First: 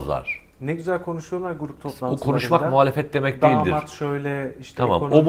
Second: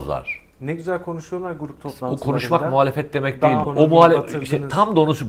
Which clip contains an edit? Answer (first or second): second